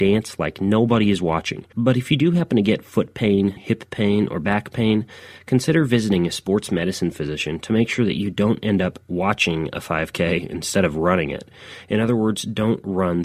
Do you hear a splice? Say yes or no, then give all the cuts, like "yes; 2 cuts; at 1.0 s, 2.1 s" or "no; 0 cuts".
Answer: yes; 2 cuts; at 1.7 s, 3.6 s